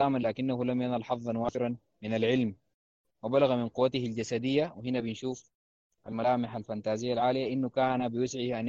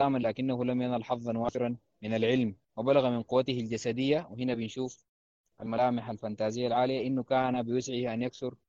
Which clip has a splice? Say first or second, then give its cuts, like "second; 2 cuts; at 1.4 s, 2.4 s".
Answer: second; 1 cut; at 2.6 s